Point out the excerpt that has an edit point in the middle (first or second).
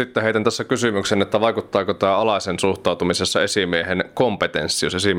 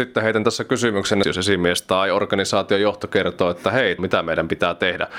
second